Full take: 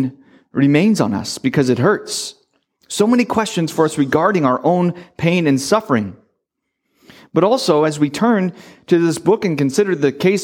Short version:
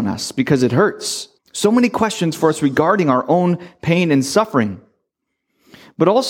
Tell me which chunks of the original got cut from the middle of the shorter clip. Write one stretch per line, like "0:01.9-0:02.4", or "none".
0:02.4-0:02.7